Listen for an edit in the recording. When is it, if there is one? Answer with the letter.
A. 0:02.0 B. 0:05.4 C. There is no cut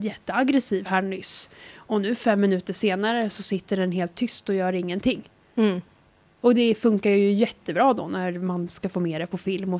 B